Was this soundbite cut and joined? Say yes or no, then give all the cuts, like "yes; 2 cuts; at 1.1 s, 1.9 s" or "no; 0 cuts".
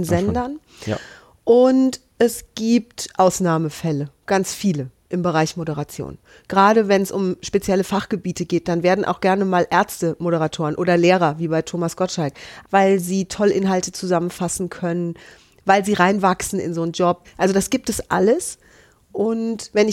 yes; 2 cuts; at 12.6 s, 17.2 s